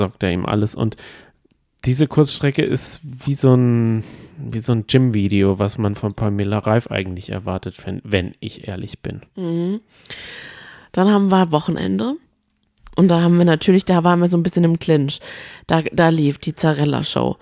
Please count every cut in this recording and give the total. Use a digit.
0